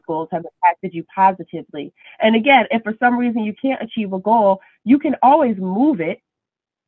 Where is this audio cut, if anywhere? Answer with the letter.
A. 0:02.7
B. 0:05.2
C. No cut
C